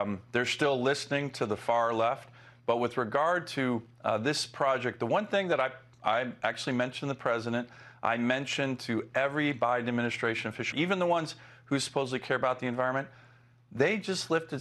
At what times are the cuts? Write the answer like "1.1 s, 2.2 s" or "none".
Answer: 10.7 s